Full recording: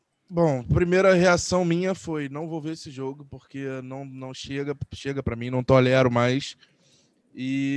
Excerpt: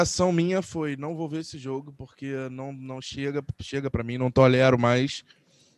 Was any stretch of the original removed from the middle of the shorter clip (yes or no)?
no